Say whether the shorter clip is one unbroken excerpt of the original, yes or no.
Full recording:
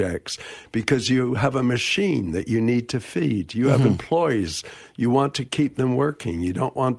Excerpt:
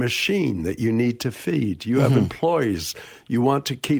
yes